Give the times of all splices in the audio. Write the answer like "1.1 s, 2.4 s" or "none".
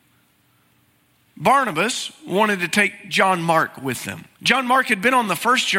4.3 s